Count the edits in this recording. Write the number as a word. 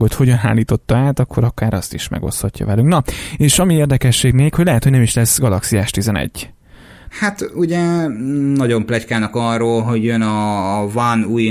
one